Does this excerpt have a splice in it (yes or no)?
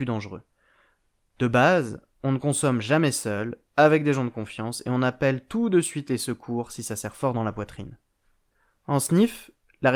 no